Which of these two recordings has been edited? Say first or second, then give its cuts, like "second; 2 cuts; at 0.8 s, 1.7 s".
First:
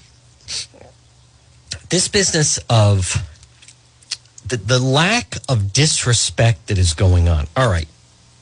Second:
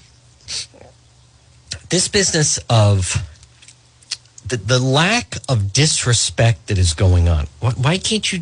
second; 1 cut; at 7.5 s